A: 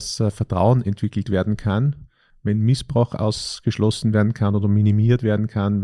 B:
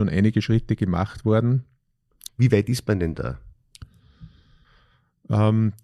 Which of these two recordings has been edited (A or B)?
B